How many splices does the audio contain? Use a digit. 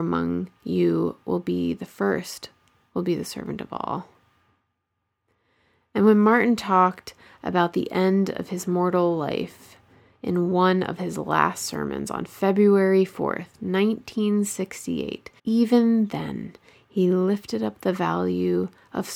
1